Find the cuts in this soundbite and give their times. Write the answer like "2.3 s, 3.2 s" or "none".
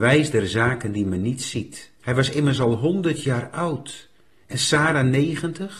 2.0 s

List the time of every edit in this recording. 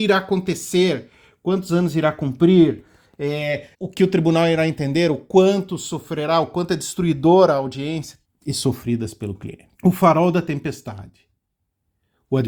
3.7 s, 8.2 s, 9.7 s

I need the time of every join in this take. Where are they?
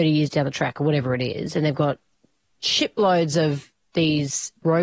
none

